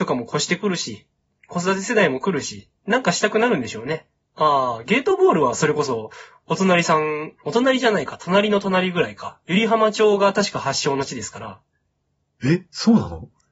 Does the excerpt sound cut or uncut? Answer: cut